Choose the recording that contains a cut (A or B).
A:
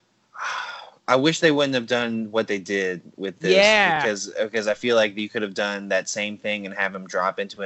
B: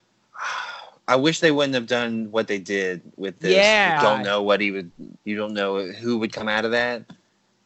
B